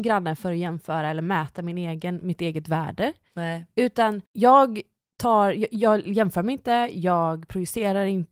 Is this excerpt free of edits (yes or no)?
no